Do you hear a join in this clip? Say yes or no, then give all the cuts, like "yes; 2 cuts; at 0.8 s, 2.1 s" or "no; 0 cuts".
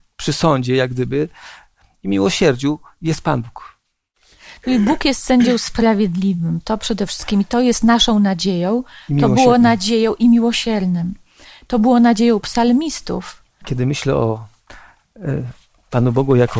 yes; 1 cut; at 13.6 s